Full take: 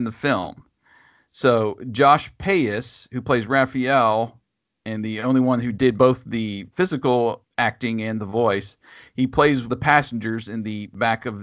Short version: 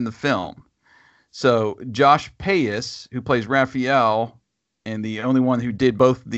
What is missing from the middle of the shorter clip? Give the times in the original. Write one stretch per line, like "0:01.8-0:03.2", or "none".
none